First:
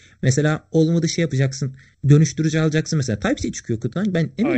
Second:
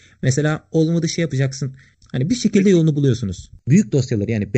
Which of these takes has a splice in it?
second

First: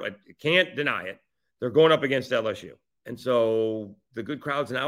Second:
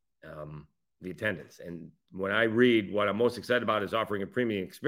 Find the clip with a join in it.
first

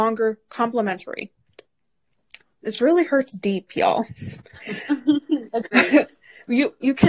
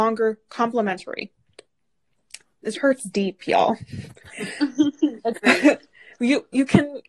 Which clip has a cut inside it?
second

